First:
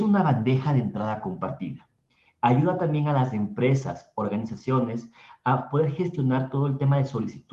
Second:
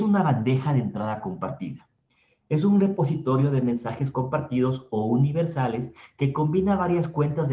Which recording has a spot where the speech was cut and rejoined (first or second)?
first